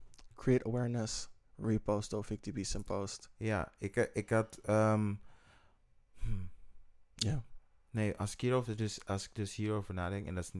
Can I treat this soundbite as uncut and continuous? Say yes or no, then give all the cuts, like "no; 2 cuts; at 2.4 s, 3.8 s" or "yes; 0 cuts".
yes; 0 cuts